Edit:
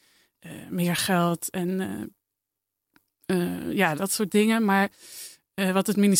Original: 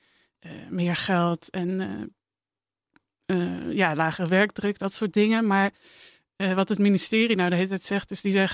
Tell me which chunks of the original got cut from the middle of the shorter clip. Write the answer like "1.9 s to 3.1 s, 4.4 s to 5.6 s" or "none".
4.0 s to 4.8 s